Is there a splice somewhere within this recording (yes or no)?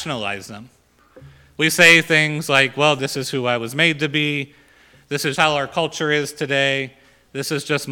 yes